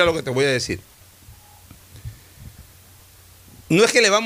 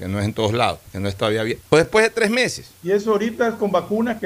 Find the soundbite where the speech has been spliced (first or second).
second